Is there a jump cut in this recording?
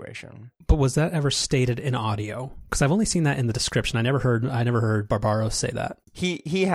no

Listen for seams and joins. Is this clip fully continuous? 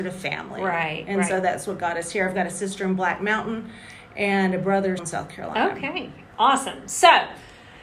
no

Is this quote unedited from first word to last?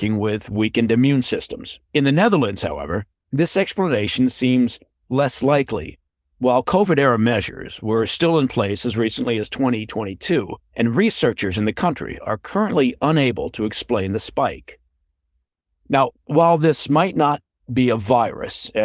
no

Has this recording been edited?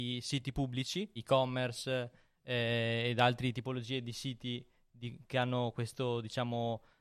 yes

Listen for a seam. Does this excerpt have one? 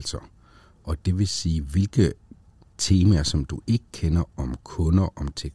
no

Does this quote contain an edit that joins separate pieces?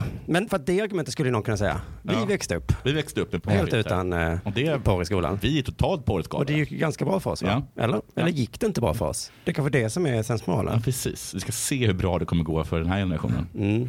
no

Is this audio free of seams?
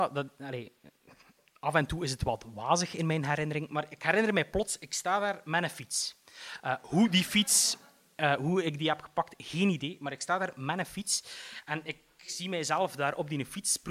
yes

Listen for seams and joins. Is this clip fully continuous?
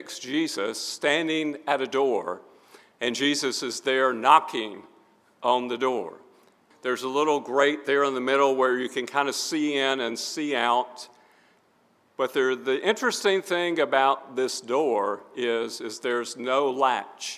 no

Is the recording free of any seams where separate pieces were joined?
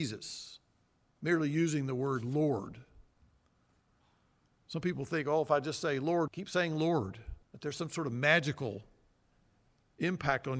no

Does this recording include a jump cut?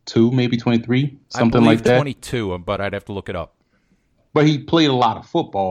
no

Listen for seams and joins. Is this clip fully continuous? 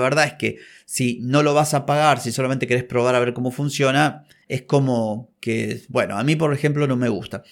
yes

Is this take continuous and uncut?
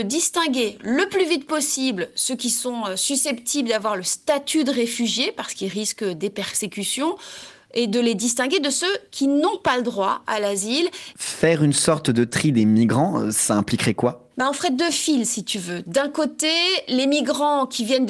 no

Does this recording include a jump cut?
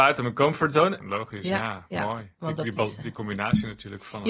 yes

